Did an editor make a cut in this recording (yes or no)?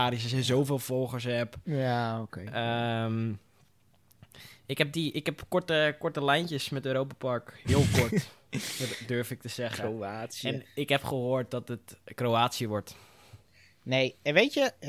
no